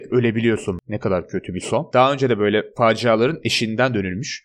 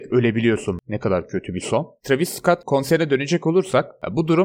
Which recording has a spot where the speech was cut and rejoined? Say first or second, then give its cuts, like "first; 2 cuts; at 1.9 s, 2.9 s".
first; 1 cut; at 1.9 s